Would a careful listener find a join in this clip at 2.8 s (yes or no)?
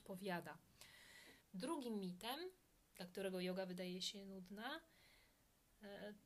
no